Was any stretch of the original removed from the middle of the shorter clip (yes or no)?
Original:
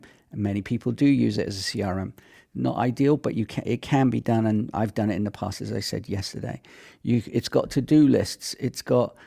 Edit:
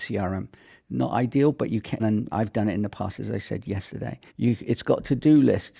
yes